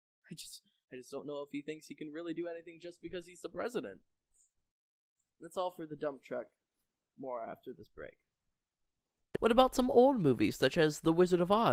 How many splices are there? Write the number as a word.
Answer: one